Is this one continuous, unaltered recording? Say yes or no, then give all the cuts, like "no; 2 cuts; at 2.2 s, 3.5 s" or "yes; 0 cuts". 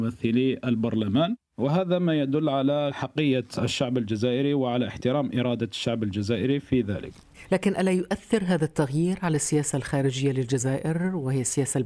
yes; 0 cuts